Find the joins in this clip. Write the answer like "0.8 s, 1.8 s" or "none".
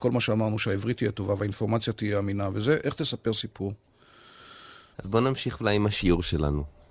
2.8 s, 4.9 s